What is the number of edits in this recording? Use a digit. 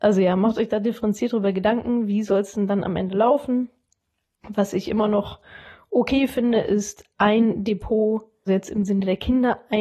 1